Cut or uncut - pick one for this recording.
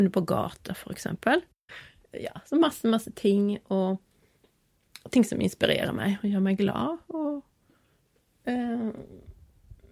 uncut